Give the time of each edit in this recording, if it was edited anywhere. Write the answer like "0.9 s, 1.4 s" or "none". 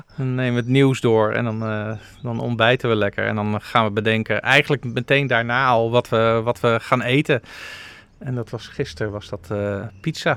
none